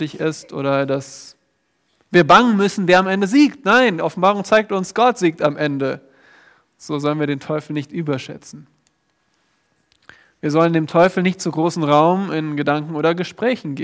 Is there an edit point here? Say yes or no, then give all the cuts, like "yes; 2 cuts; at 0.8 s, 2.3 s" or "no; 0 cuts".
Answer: no; 0 cuts